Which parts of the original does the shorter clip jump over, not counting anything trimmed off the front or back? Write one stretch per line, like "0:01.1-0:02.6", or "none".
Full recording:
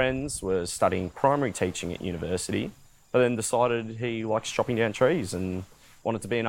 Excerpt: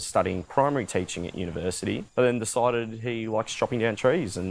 0:02.7-0:03.0